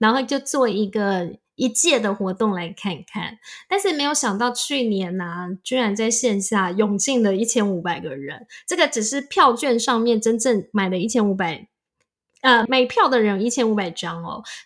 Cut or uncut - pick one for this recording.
cut